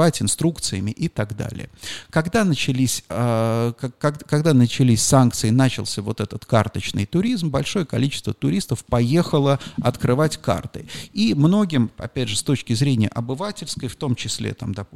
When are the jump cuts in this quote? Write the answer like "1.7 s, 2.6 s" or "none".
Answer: none